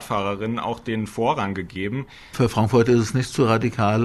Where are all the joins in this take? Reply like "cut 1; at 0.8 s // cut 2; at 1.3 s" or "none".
cut 1; at 2.3 s